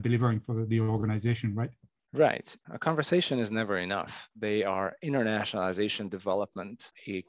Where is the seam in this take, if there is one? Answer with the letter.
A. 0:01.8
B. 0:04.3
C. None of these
B